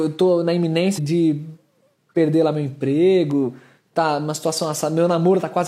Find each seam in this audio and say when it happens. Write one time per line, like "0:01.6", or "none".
0:01.0